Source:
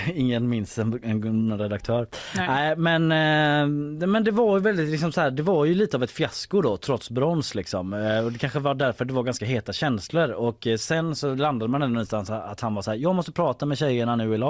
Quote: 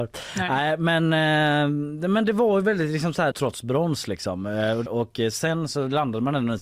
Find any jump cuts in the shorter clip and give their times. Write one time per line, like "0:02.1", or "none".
0:03.3
0:04.9